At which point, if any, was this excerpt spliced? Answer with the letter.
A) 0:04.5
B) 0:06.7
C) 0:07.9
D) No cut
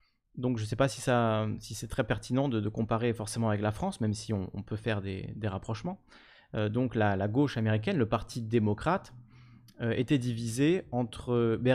D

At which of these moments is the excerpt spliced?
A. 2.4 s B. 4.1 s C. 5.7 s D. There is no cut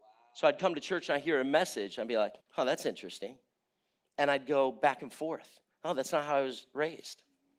A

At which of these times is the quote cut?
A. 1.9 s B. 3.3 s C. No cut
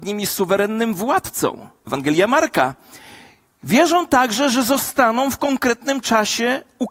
A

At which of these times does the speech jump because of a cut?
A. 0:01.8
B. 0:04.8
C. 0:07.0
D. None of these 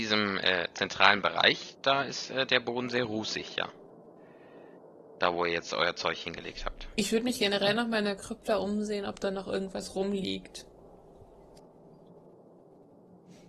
D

